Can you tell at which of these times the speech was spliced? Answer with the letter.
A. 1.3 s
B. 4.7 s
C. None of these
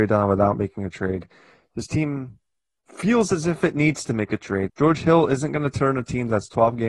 B